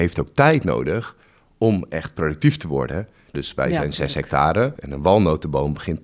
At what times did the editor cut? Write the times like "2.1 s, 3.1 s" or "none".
3.3 s, 4.8 s